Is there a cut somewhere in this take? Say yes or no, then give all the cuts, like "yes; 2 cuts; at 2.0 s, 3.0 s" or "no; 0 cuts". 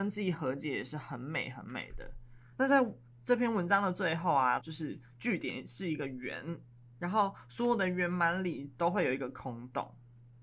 yes; 2 cuts; at 2.5 s, 4.6 s